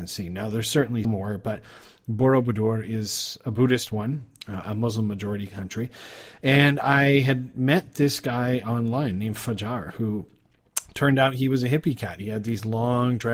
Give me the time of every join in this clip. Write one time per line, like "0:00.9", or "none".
0:01.0
0:04.6